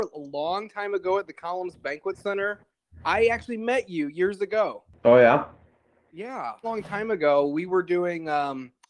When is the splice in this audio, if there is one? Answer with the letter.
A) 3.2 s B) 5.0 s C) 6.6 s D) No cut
C